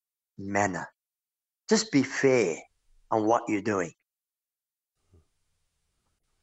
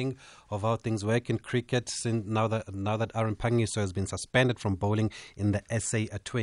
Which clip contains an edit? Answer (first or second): first